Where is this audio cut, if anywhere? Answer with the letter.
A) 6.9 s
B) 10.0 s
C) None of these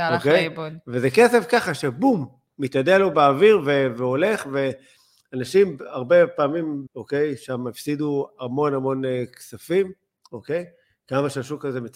A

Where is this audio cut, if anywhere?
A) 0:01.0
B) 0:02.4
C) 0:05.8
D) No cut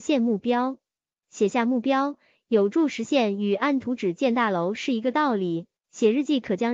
C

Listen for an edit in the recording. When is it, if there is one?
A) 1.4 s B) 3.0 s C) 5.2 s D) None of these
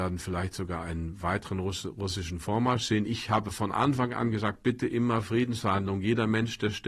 D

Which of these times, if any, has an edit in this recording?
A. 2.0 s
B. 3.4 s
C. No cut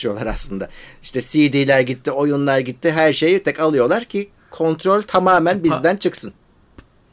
B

